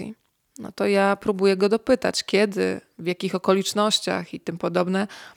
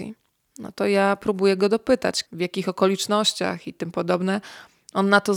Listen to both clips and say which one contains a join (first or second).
second